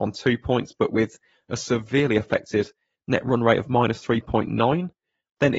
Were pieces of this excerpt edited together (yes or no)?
no